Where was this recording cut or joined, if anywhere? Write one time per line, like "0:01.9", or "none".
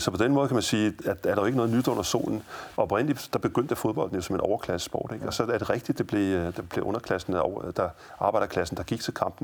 0:02.8